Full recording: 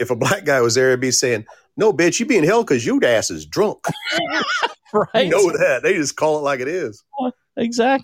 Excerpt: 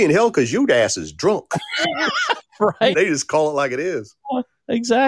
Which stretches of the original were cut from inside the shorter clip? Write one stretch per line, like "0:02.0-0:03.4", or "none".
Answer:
0:05.3-0:05.8

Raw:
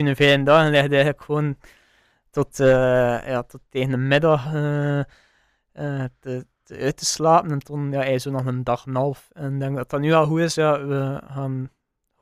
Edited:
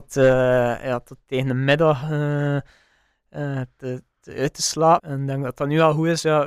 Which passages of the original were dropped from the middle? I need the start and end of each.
0:07.4-0:09.3

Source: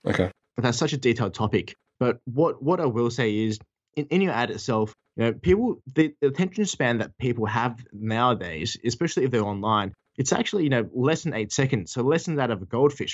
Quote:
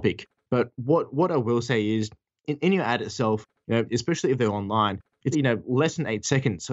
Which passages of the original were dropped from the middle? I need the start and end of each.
0:05.4-0:08.8
0:10.2-0:10.6

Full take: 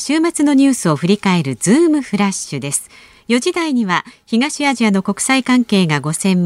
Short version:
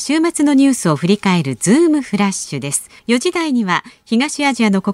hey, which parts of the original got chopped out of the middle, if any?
0:03.0-0:03.2

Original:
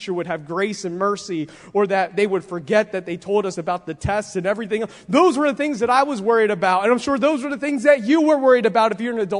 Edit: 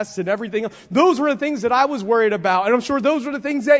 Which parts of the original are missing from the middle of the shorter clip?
none

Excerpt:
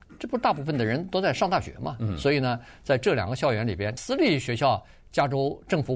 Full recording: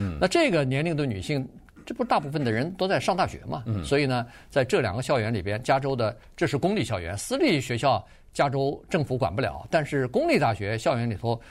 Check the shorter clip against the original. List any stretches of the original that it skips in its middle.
0:05.6-0:07.2

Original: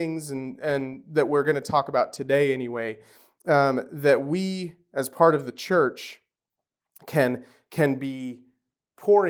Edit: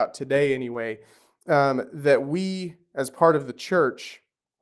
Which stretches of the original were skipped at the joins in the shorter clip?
none

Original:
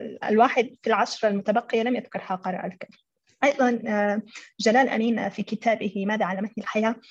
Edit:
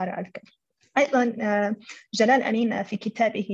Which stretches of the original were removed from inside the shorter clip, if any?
none

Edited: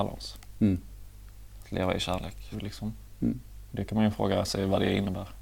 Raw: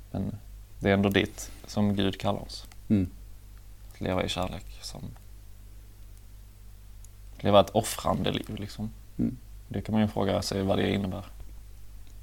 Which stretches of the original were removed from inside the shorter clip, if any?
0:04.8-0:08.5

